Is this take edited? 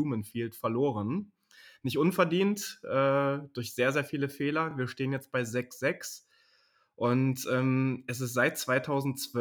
no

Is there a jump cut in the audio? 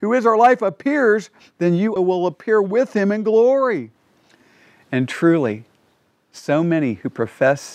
yes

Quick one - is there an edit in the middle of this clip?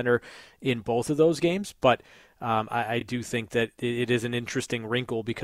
no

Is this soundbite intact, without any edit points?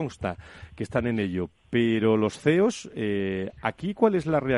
yes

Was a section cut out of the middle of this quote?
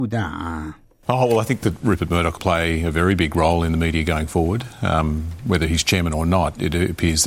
yes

